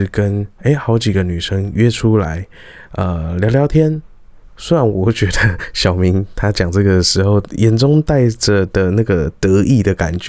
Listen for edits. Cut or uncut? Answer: cut